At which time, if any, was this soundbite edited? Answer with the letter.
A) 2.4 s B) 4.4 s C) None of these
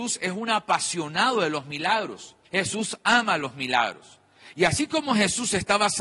A